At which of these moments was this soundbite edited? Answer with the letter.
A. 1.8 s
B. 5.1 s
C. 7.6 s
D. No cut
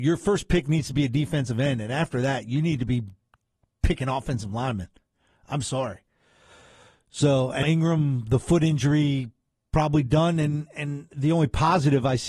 C